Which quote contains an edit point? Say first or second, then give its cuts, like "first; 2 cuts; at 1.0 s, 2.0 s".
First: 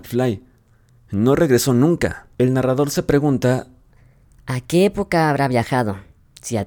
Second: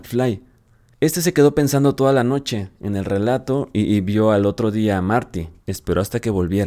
second; 2 cuts; at 0.9 s, 5.6 s